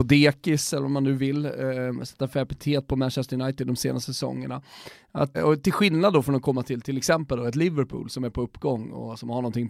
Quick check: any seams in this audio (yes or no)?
yes